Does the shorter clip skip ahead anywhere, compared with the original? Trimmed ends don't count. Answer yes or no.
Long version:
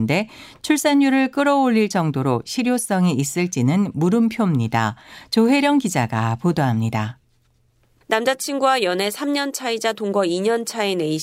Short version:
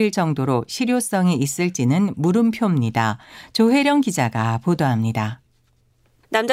no